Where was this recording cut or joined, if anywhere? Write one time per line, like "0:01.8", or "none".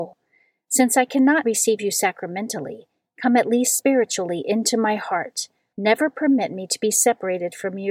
0:01.4
0:05.7